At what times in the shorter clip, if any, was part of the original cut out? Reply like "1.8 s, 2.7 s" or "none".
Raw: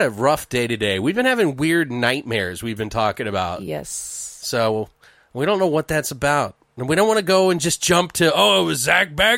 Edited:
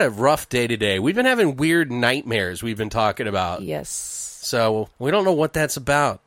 4.9 s